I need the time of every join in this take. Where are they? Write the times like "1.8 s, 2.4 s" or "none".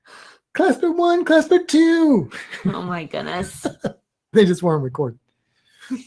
4.3 s